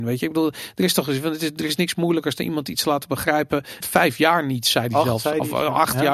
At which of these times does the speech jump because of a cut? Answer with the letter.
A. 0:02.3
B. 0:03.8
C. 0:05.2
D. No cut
B